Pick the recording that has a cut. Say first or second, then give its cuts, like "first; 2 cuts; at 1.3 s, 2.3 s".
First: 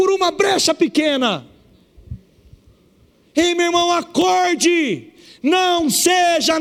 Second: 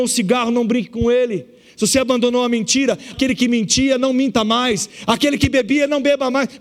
second; 2 cuts; at 3.1 s, 5.1 s